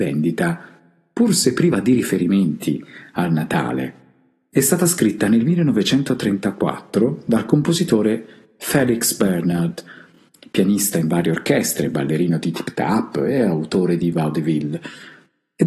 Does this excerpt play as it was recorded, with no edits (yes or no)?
yes